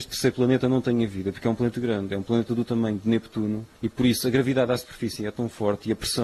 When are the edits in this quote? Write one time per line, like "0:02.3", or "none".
0:01.7
0:03.7